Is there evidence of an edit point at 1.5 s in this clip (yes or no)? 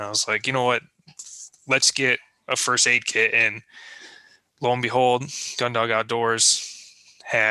no